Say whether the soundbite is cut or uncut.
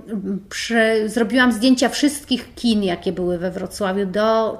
uncut